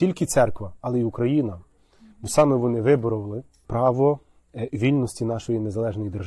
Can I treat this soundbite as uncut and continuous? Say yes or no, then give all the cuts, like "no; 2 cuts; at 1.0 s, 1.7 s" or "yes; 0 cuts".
yes; 0 cuts